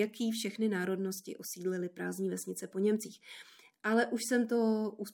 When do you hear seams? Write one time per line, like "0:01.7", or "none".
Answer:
none

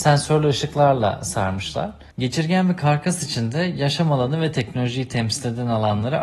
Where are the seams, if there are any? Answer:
0:02.1

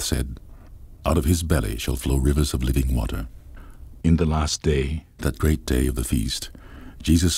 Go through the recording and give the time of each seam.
0:04.0

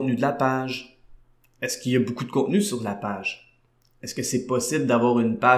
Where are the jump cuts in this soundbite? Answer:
none

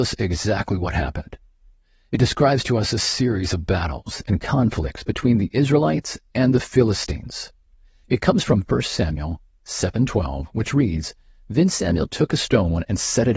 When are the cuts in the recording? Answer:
0:08.0

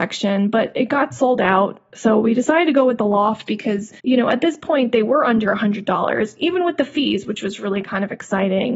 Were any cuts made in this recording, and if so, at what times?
0:04.0

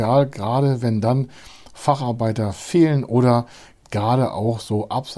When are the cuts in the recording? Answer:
none

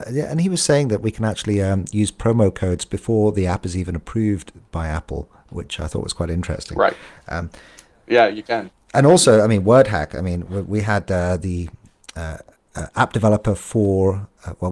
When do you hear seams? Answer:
none

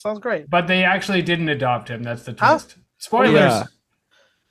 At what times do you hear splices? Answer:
none

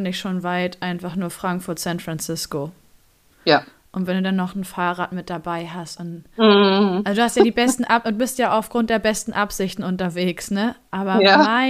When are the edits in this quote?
none

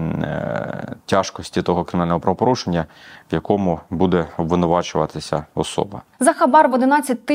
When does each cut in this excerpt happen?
none

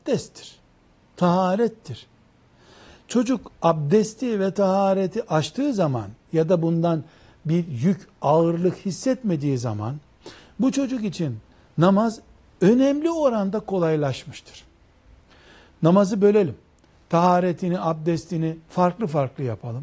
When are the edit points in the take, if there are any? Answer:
none

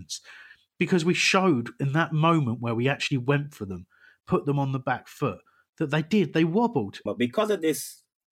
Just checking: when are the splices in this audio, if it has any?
0:07.1

